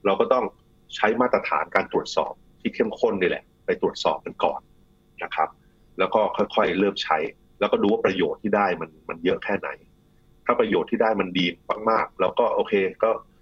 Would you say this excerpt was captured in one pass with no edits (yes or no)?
yes